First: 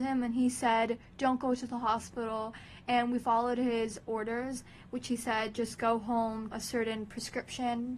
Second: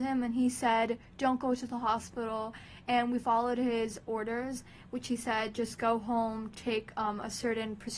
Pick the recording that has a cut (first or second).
first